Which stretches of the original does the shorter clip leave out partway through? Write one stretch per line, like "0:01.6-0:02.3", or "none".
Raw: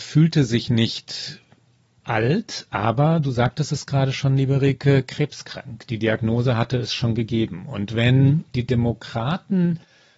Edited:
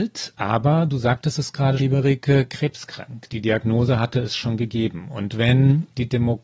0:04.1-0:04.4